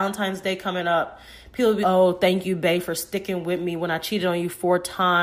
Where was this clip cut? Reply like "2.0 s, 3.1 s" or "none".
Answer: 1.8 s